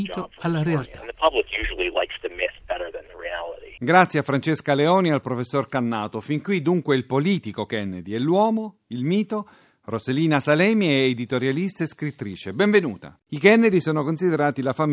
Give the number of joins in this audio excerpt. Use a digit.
1